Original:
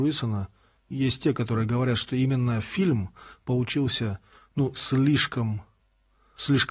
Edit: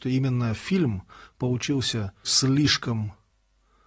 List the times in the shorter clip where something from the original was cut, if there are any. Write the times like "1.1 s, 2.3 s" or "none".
2.2 s